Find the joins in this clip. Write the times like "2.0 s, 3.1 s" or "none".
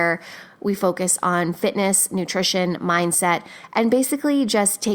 none